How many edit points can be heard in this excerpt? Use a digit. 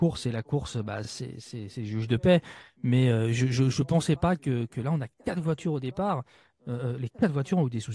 0